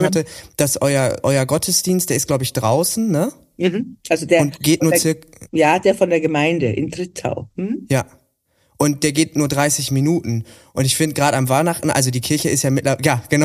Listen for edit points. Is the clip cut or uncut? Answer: uncut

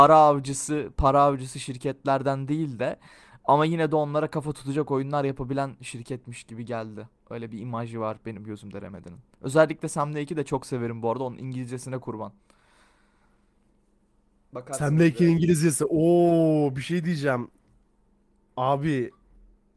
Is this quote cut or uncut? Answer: uncut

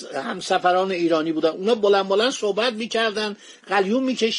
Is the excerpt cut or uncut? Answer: uncut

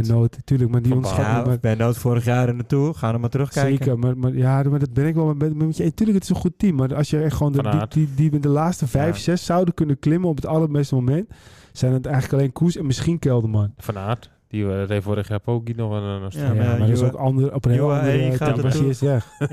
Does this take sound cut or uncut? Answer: uncut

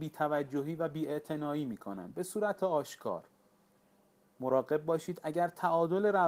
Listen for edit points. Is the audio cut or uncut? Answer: uncut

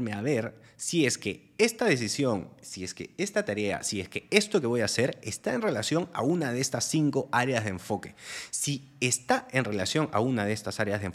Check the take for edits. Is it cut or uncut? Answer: uncut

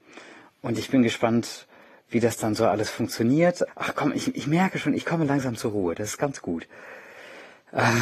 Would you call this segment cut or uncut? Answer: cut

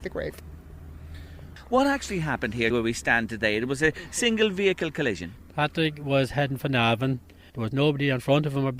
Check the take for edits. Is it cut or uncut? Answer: cut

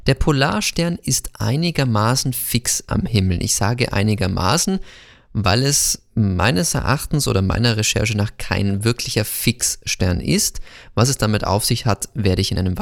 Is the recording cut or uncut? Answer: uncut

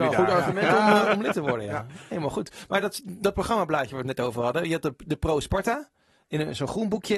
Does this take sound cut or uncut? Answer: uncut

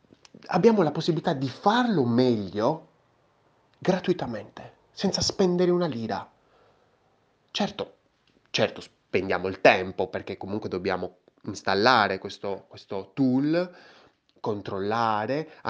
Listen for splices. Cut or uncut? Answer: uncut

